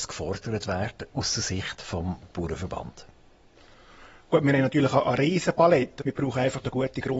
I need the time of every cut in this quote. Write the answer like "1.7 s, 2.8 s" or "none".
6.0 s